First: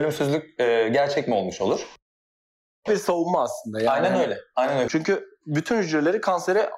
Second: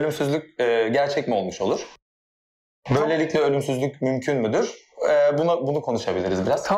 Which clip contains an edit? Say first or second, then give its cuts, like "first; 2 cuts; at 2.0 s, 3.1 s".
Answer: first; 2 cuts; at 2.9 s, 4.9 s